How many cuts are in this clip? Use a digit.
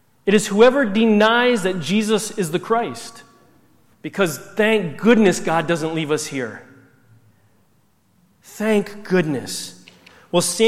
1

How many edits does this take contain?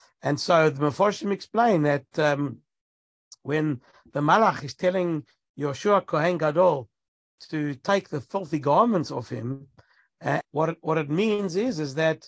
1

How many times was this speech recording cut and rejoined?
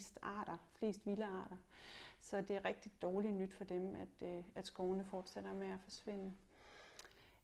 0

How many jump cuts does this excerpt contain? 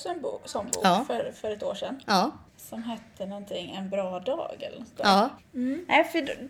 2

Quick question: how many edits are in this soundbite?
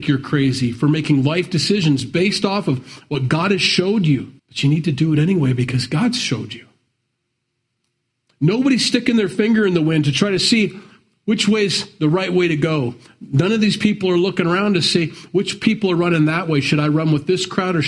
1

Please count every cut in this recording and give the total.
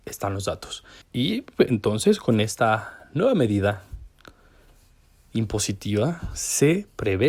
1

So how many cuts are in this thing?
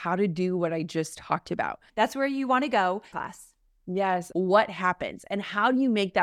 3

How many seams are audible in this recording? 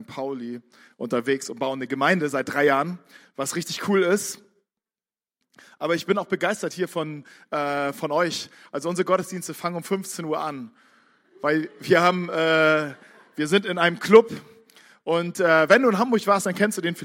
0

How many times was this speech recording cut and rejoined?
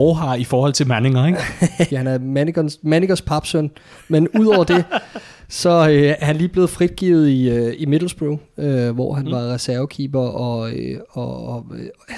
1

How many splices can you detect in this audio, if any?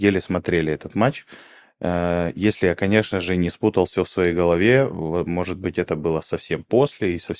0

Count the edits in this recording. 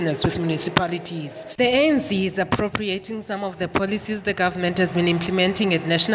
1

